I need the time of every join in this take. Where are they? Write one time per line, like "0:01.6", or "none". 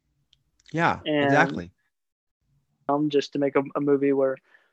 0:02.9